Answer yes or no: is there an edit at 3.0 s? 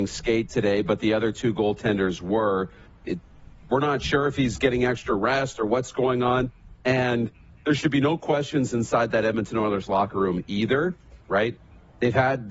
yes